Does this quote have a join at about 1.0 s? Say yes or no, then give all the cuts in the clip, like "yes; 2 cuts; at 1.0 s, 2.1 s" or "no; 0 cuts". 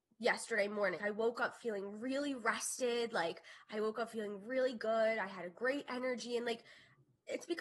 yes; 1 cut; at 1.0 s